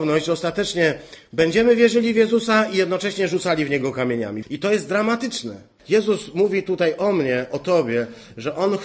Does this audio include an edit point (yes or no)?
yes